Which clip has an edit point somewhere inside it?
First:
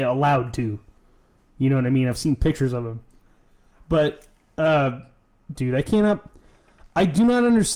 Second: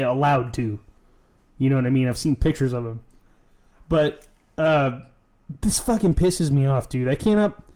first; 1 cut; at 5.5 s

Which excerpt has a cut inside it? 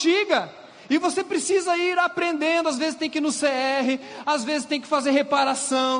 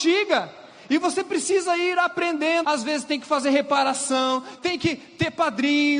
second; 2 cuts; at 2.6 s, 4.6 s

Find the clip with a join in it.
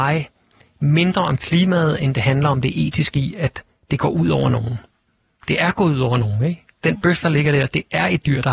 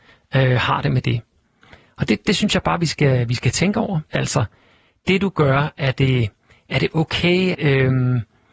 second; 2 cuts; at 4.1 s, 7.5 s

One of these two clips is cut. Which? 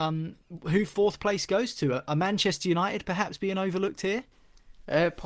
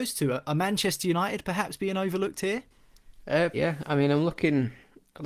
second; 1 cut; at 3.5 s

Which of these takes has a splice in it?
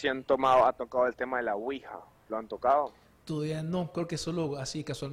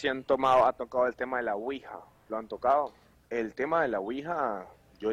second; 1 cut; at 3.1 s

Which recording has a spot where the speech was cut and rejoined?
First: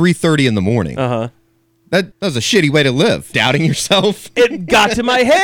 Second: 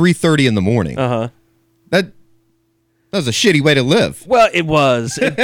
first; 2 cuts; at 2.1 s, 3.3 s

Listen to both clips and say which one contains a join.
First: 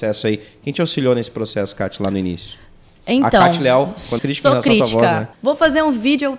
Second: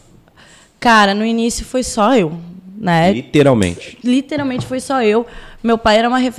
first; 2 cuts; at 4.2 s, 5.3 s

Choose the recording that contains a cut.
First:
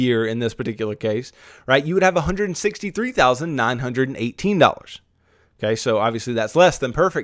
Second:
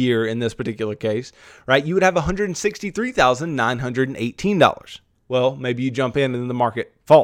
second; 1 cut; at 5.2 s

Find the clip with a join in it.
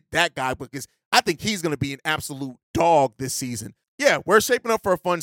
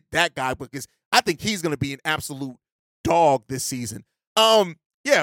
first; 2 cuts; at 2.6 s, 3.8 s

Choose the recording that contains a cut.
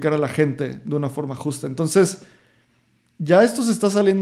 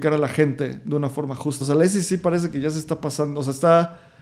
second; 1 cut; at 1.6 s

